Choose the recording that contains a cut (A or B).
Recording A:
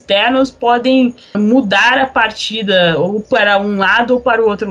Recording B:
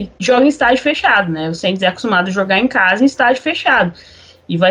A